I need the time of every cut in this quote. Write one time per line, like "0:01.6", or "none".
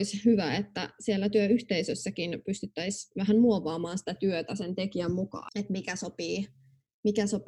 0:05.5